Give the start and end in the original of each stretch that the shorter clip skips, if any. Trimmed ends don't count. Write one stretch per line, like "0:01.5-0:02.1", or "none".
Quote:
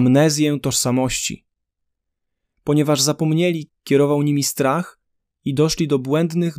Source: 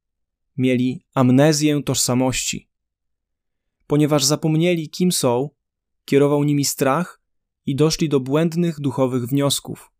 0:04.9-0:05.9